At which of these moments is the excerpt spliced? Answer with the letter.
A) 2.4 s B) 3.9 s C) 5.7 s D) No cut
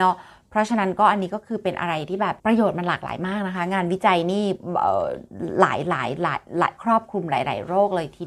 A